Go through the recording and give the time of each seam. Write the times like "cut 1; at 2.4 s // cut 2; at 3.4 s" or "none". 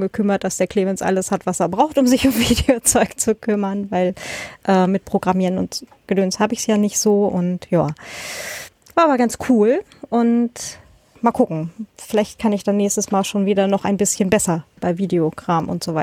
cut 1; at 11.2 s // cut 2; at 14.8 s